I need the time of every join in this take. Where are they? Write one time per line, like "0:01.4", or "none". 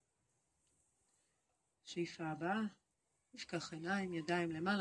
none